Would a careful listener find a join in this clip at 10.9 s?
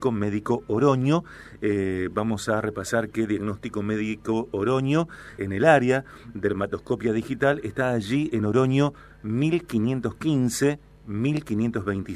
no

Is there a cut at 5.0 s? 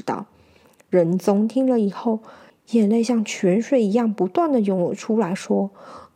no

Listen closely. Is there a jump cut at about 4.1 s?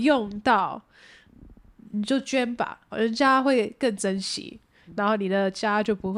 no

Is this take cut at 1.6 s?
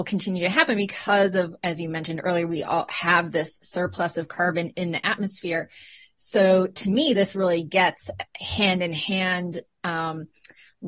yes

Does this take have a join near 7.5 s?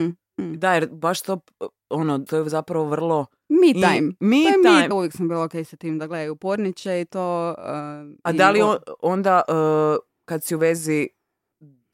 no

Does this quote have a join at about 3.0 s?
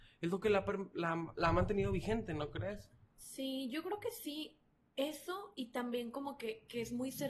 no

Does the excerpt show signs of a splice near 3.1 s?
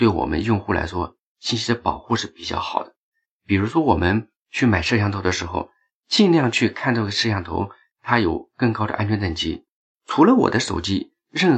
no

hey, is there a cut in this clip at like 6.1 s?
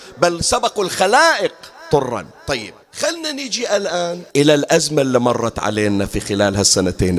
no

